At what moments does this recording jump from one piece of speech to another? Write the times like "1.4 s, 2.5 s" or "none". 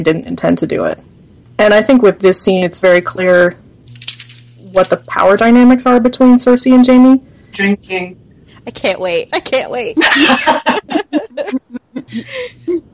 7.5 s

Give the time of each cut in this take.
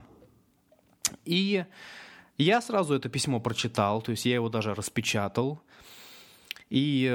none

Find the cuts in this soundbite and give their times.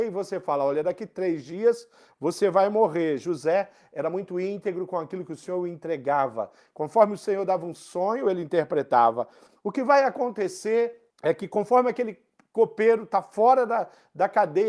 none

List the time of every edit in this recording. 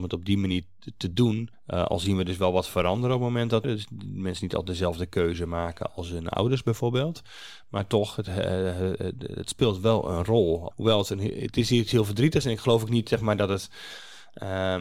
1.5 s, 3.6 s, 10.7 s

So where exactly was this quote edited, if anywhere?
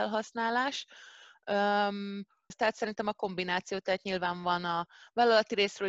2.5 s

